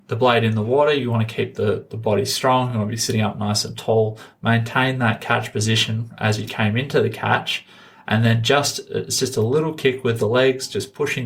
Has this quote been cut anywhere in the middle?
no; 0 cuts

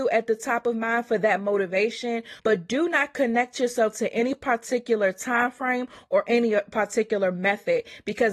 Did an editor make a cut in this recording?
yes; 1 cut; at 2.4 s

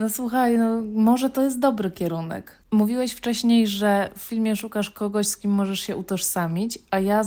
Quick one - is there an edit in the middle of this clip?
no; 0 cuts

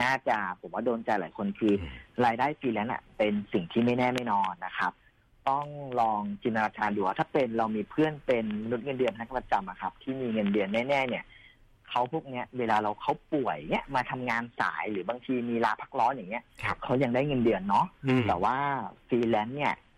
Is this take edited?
yes; 1 cut; at 4.5 s

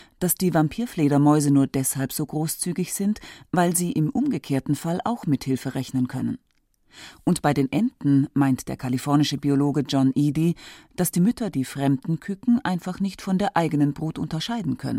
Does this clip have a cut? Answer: no; 0 cuts

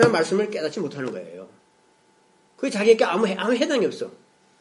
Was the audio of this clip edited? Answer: no; 0 cuts

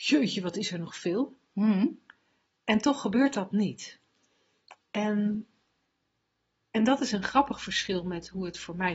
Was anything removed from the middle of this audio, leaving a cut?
no; 0 cuts

